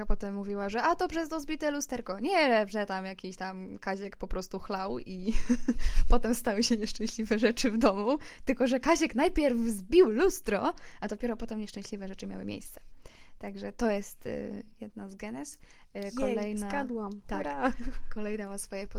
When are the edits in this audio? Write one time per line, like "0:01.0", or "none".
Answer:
none